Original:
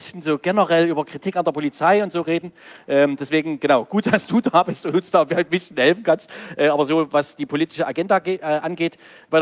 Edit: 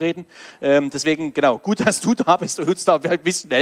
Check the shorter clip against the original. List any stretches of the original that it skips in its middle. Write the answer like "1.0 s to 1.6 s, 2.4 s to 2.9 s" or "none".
none